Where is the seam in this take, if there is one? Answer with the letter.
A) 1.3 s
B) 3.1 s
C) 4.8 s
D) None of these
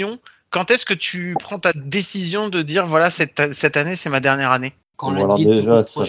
C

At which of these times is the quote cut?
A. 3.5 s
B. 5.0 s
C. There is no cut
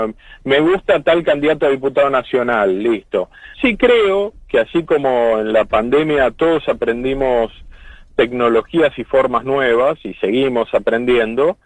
A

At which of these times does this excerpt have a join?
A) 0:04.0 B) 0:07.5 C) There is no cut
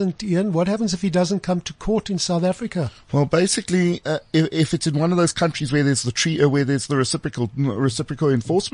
A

